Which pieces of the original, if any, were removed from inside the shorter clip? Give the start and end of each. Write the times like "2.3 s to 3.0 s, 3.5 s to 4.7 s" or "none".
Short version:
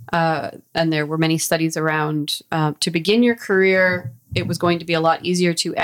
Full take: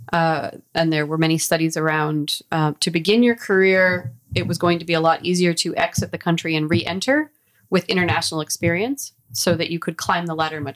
none